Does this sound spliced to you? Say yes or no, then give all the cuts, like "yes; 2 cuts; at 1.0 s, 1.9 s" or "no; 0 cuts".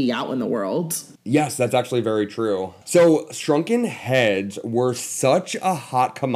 yes; 2 cuts; at 1.2 s, 2.8 s